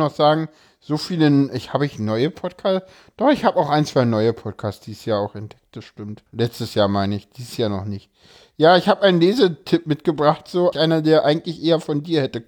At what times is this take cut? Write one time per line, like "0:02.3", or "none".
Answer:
0:06.3
0:10.7